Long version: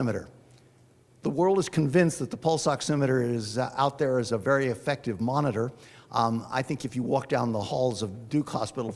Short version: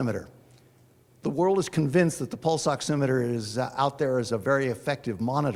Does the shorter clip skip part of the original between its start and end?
no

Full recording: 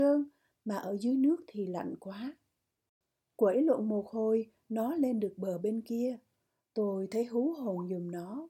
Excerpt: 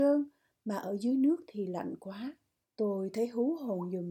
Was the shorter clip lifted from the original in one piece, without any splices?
no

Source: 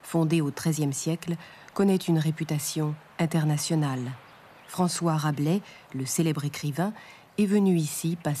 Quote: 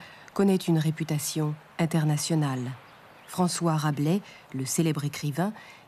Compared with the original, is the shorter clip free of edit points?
yes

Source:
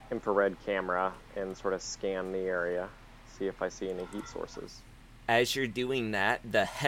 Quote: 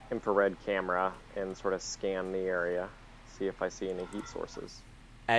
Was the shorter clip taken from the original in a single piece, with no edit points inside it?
yes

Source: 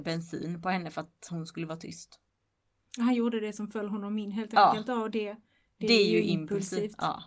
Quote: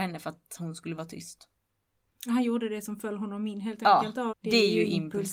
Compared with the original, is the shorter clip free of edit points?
no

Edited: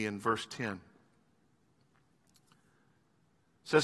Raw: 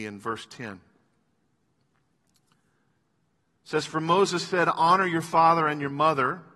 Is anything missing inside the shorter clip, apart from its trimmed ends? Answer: no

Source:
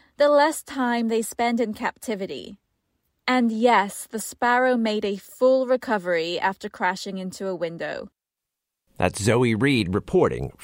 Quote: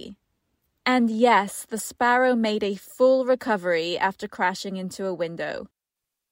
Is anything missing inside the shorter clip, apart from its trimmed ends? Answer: no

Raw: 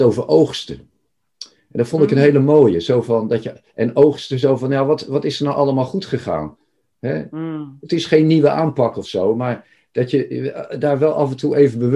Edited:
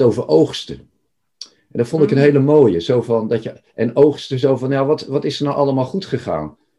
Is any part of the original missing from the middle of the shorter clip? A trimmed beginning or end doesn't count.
no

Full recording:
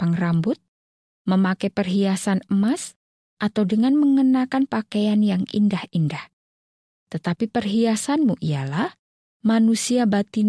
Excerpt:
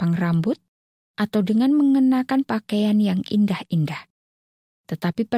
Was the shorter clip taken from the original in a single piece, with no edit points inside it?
no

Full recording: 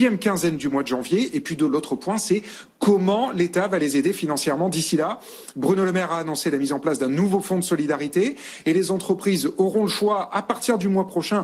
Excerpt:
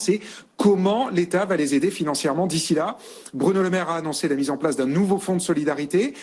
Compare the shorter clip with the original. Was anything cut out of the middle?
no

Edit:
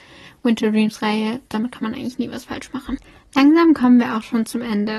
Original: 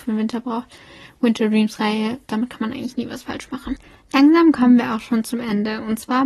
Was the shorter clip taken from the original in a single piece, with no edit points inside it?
yes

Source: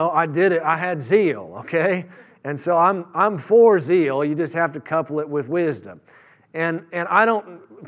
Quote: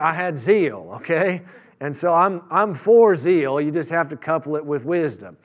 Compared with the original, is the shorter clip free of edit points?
yes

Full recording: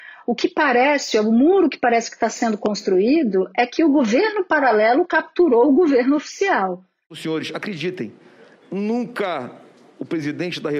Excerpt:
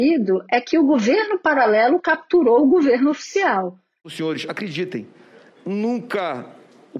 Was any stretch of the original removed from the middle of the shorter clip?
no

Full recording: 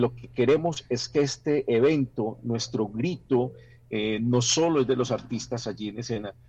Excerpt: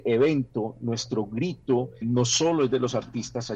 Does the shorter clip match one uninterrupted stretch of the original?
no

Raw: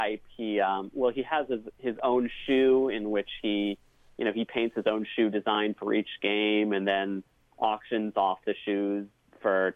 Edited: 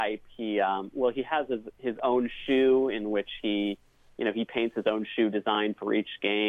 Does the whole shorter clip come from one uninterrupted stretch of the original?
yes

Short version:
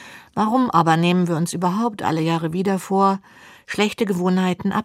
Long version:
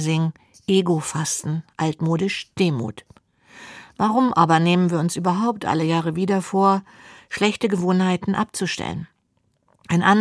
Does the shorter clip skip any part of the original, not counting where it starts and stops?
no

